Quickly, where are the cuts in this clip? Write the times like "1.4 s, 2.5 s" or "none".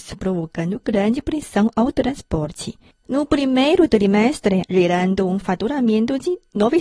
2.9 s, 4.7 s